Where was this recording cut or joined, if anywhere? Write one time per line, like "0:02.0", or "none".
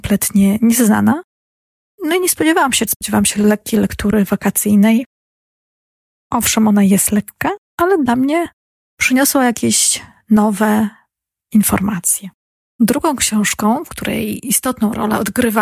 0:02.9